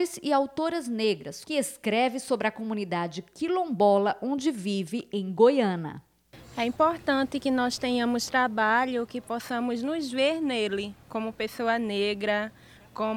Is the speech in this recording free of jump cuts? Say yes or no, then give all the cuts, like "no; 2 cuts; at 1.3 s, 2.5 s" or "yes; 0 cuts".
no; 2 cuts; at 1.5 s, 11.0 s